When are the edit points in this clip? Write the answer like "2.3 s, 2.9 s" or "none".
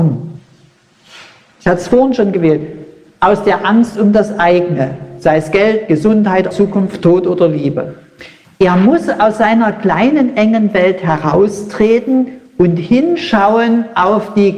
6.5 s